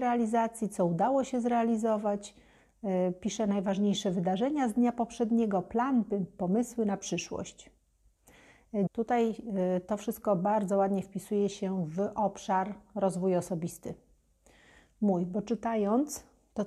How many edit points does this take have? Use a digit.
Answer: 1